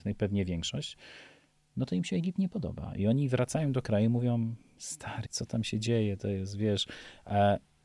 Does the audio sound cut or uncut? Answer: cut